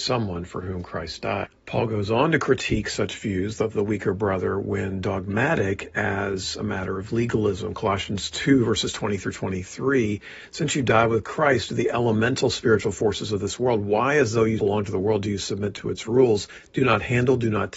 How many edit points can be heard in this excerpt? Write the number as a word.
one